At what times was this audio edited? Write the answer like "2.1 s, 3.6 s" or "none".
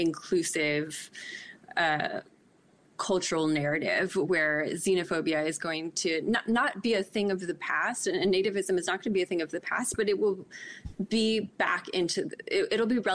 none